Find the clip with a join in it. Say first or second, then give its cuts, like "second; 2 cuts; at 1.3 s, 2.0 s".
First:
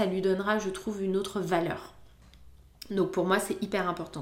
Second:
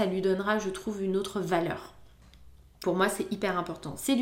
second; 1 cut; at 2.8 s